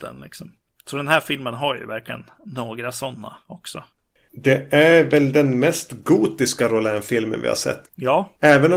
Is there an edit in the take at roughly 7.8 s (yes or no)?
yes